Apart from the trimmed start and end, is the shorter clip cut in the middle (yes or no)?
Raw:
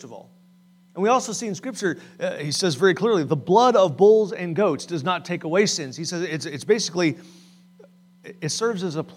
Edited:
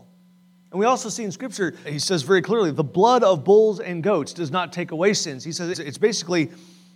yes